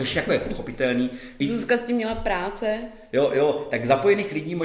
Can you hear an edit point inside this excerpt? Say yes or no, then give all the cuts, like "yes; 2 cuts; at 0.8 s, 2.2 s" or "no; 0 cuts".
yes; 1 cut; at 1.4 s